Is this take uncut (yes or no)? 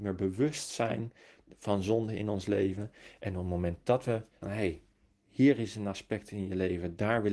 no